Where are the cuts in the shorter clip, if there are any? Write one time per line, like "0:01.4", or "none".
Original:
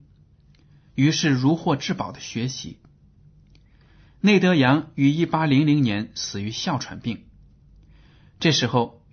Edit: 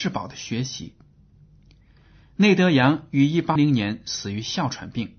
0:03.6